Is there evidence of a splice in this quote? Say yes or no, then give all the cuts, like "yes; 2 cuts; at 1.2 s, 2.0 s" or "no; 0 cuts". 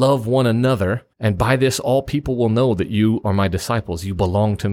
yes; 1 cut; at 1.1 s